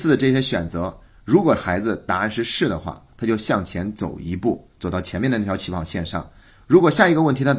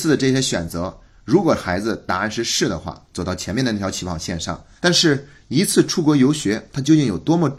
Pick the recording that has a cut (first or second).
second